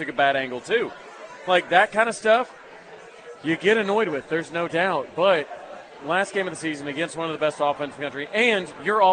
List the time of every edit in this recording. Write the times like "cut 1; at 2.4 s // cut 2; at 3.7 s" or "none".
none